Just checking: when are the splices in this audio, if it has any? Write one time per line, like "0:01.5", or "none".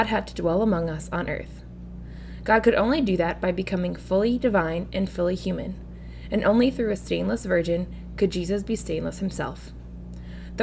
none